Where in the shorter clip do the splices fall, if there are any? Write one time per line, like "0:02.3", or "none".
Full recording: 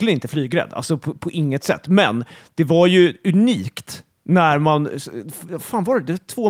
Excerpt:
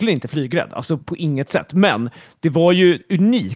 0:01.0

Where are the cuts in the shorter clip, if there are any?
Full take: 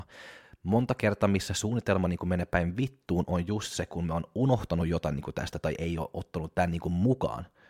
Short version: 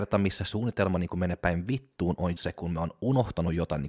0:02.4

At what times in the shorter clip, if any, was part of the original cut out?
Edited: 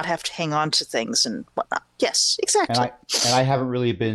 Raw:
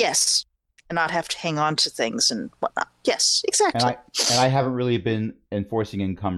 none

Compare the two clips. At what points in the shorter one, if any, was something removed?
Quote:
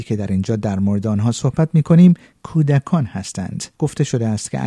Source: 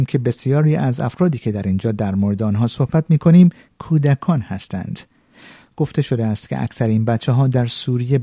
0:03.7

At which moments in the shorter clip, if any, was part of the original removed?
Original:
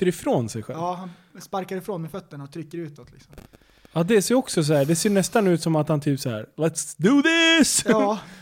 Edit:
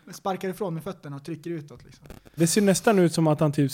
0:02.4

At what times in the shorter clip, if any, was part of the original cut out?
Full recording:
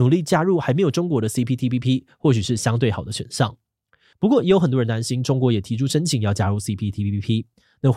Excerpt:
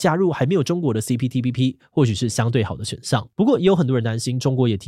0:03.3

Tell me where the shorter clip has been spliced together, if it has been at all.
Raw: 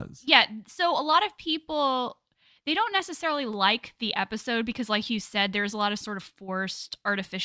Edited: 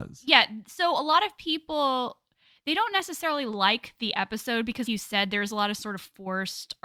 0:04.9

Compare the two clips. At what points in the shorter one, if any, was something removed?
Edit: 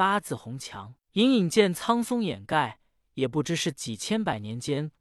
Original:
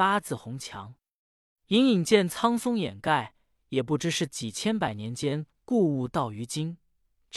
0:01.0

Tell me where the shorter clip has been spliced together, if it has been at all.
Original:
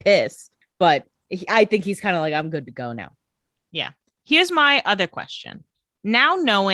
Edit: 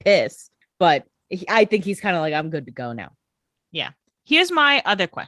none

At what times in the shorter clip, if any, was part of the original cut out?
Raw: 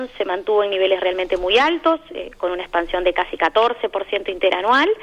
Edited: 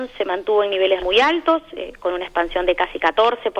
0:01.0

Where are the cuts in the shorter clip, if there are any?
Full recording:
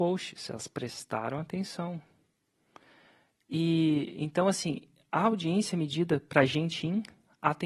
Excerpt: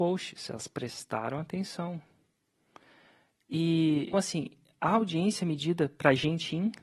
0:04.1

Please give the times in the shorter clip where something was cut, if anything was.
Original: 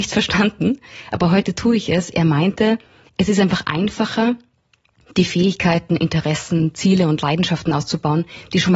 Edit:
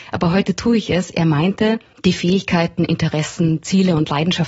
0:01.9

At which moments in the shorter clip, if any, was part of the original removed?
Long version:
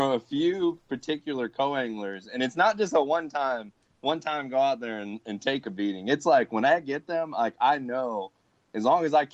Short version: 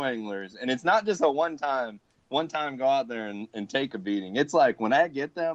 none

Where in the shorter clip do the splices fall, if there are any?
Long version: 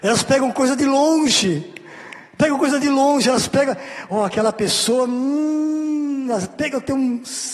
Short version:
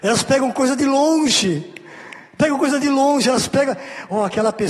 none

